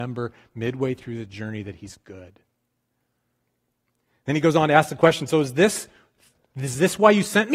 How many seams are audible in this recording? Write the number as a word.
zero